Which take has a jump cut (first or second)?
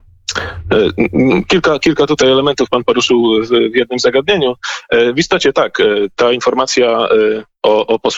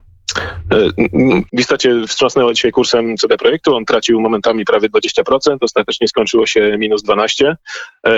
second